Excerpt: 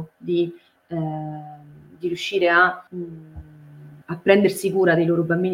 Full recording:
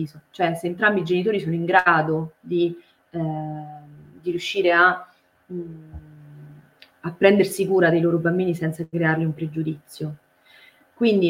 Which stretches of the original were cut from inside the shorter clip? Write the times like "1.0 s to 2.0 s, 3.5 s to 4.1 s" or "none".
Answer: 5.1 s to 5.4 s, 6.6 s to 7.0 s